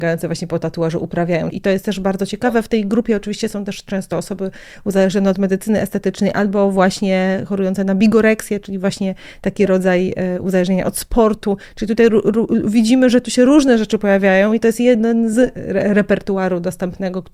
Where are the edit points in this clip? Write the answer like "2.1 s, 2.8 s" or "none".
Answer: 1.5 s